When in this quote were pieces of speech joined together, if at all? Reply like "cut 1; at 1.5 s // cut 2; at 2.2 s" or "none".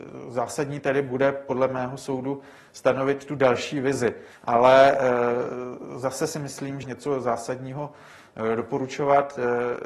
cut 1; at 4.3 s // cut 2; at 6.8 s